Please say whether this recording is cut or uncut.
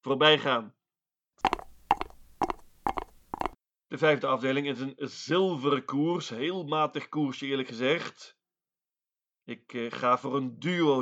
uncut